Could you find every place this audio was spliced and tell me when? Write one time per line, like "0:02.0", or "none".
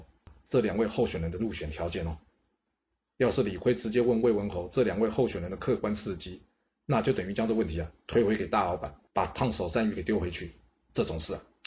none